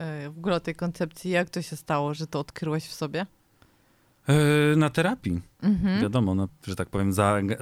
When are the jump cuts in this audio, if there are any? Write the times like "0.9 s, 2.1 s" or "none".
2.2 s, 6.5 s